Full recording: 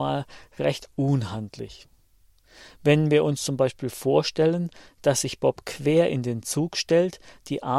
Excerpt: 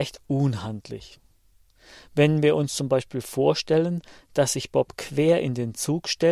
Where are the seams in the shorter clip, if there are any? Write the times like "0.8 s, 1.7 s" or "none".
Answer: none